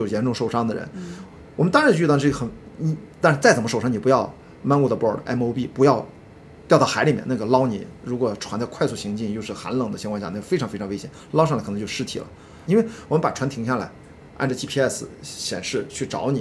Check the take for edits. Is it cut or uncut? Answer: cut